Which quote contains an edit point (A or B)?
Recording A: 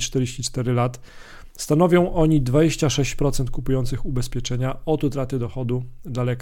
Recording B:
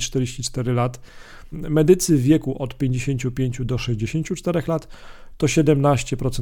B